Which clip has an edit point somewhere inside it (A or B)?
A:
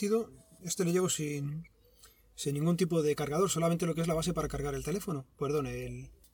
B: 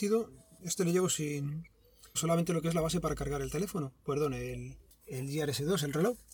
B